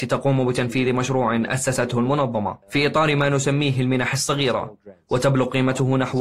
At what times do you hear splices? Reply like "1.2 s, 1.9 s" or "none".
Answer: 2.6 s